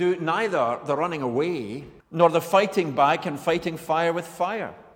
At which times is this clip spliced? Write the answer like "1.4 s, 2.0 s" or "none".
2.0 s